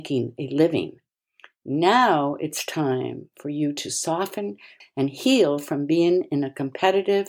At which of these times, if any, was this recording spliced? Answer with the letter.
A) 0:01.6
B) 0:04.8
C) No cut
B